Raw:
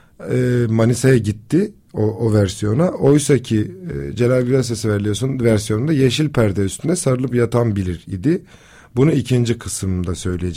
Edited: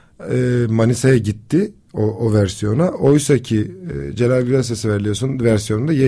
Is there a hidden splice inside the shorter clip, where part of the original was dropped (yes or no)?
no